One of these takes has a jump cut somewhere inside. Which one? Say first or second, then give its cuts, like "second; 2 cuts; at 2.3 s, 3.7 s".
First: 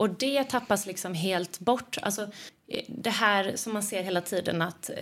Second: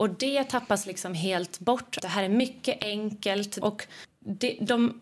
second; 2 cuts; at 2.0 s, 3.6 s